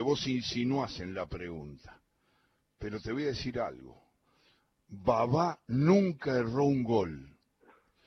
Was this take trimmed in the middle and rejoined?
no; 0 cuts

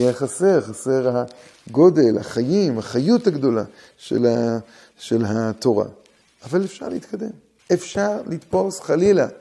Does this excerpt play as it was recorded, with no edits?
no; 1 cut; at 7.6 s

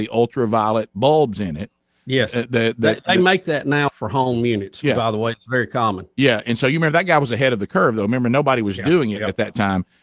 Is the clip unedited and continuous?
yes; 0 cuts

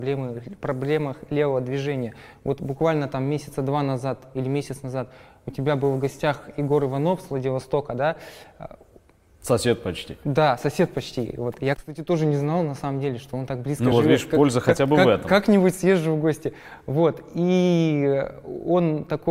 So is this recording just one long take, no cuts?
yes; 0 cuts

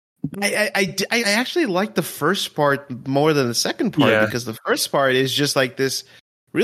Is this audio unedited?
no; 1 cut; at 1.2 s

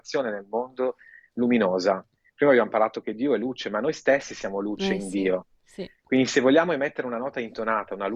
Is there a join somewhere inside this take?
no; 0 cuts

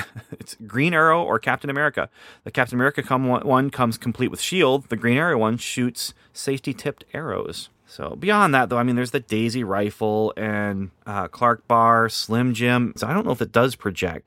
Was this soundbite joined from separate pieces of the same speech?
yes; 3 cuts; at 7.8 s, 11.0 s, 13.0 s

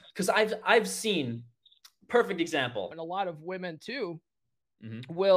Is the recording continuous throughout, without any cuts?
no; 1 cut; at 2.9 s

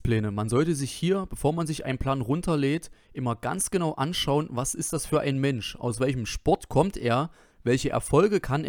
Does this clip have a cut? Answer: no; 0 cuts

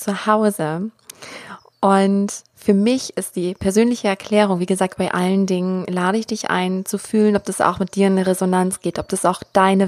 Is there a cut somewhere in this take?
no; 0 cuts

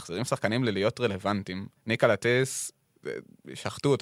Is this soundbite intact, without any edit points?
no; 1 cut; at 1.8 s

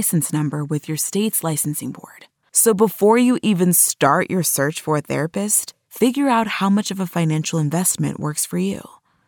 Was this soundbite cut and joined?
yes; 1 cut; at 2.4 s

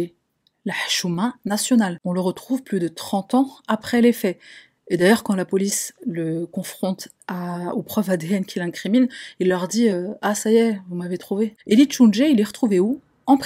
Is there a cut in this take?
no; 0 cuts

